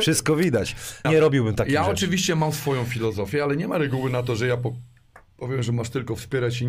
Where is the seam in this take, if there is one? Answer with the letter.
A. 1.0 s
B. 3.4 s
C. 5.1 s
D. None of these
A